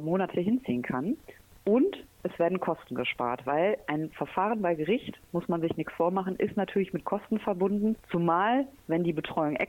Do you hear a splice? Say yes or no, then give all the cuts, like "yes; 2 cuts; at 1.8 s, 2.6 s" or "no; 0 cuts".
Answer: no; 0 cuts